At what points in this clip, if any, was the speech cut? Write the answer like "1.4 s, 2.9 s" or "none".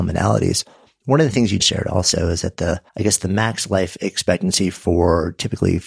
1.6 s, 2.9 s